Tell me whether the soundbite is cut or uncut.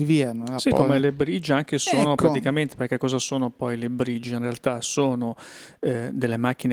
uncut